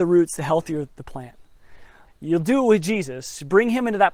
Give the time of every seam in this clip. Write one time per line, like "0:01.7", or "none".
0:02.1